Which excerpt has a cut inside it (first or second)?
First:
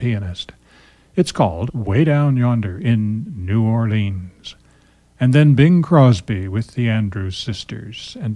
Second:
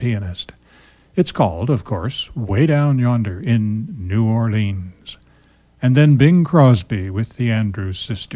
first